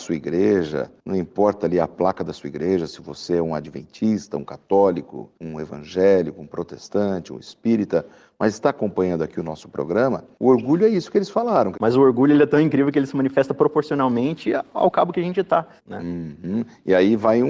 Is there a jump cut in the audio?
yes; 2 cuts; at 11.7 s, 15.8 s

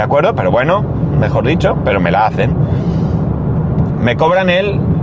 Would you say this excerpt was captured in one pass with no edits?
no; 2 cuts; at 1.1 s, 3.9 s

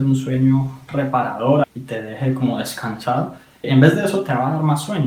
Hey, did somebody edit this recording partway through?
yes; 2 cuts; at 1.6 s, 3.6 s

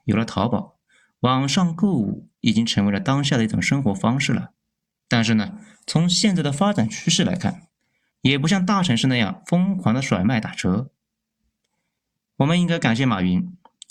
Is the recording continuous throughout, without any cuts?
no; 2 cuts; at 4.9 s, 8.1 s

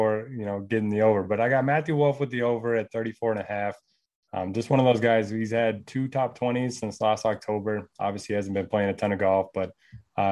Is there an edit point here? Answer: no; 0 cuts

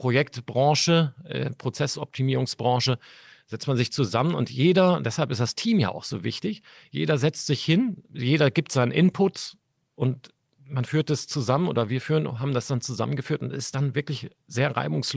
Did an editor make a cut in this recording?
no; 0 cuts

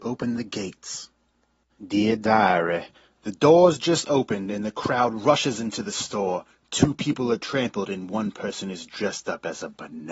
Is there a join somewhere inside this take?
yes; 1 cut; at 1.8 s

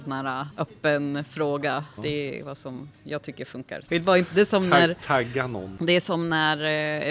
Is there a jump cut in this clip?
yes; 2 cuts; at 2.0 s, 3.9 s

